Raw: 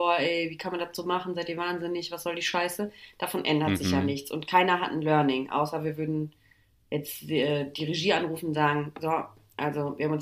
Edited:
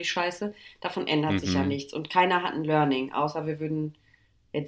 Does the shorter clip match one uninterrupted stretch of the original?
yes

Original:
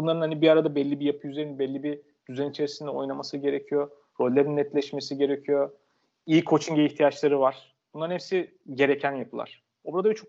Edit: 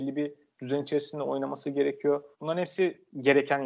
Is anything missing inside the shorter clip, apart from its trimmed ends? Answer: yes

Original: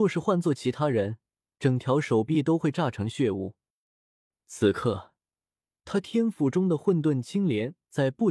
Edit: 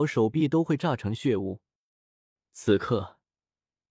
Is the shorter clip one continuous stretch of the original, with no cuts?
yes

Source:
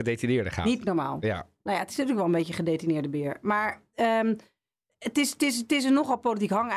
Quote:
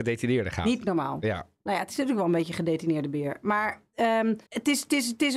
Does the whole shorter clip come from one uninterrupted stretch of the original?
no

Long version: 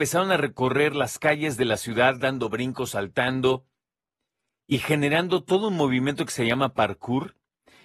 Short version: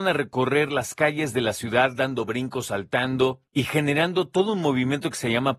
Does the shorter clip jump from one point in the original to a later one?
yes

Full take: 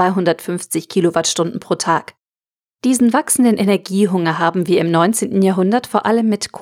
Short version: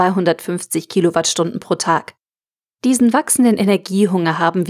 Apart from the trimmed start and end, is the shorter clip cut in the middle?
no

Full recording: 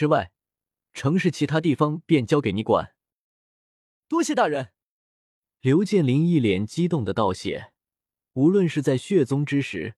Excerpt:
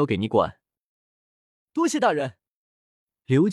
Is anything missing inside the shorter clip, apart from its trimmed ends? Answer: no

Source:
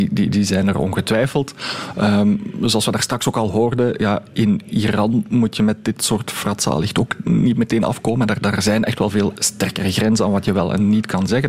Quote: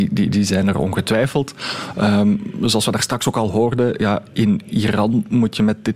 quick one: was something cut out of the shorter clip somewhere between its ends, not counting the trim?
no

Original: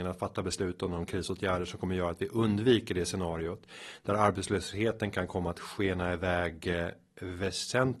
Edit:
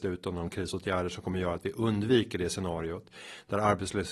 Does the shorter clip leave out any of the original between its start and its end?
no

